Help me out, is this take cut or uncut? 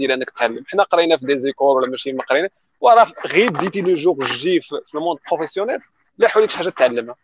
uncut